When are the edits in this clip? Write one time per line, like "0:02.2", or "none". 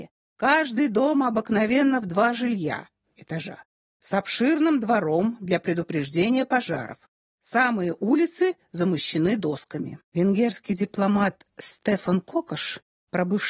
0:10.0